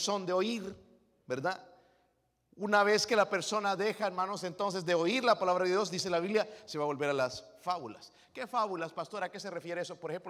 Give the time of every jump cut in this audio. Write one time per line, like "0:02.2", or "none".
none